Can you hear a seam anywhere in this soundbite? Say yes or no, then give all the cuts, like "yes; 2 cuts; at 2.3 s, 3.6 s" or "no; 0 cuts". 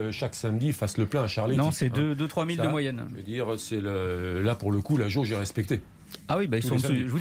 no; 0 cuts